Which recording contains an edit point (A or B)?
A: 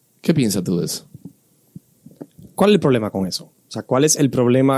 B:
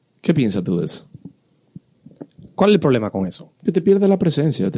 B